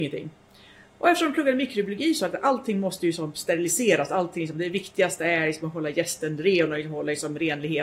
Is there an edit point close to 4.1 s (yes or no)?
no